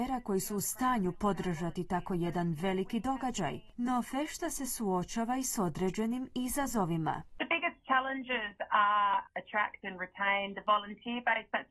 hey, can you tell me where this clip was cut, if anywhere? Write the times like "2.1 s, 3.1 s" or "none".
3.7 s, 9.2 s